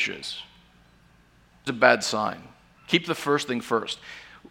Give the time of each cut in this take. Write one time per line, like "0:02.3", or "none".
0:01.7